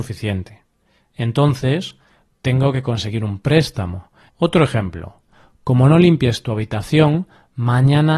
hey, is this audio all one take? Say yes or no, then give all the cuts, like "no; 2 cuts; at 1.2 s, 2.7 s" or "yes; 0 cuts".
no; 2 cuts; at 2.3 s, 4.3 s